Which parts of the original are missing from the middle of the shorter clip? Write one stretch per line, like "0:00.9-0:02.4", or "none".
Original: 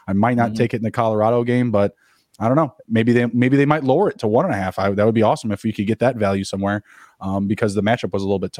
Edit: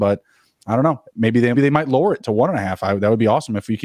0:03.3-0:03.5